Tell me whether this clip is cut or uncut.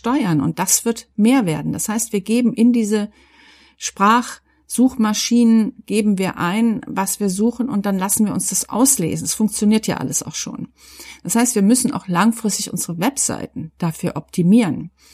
uncut